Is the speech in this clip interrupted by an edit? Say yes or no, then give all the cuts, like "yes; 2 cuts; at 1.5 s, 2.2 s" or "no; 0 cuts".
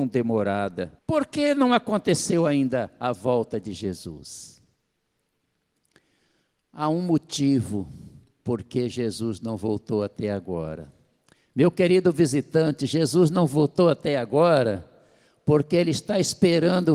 yes; 1 cut; at 1.0 s